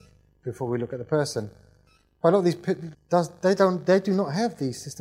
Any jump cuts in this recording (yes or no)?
yes